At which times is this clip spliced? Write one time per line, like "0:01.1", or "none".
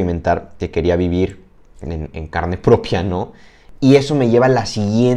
0:03.8